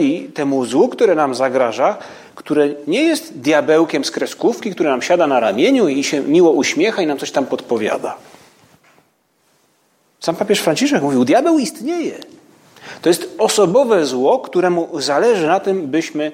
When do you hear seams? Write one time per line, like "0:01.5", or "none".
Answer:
none